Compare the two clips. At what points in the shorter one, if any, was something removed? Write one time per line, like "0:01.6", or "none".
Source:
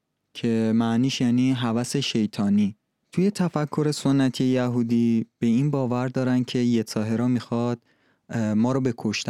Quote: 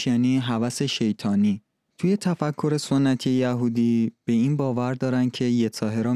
none